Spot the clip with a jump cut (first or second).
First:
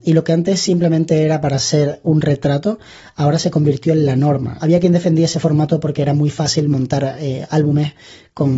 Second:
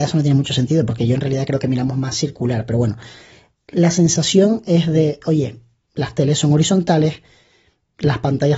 first